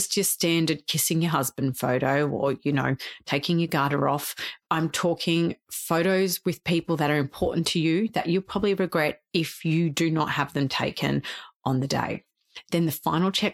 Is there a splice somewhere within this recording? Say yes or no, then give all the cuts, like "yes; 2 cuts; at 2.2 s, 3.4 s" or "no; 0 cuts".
no; 0 cuts